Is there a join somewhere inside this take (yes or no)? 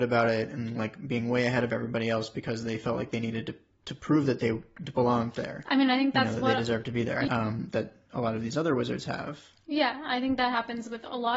yes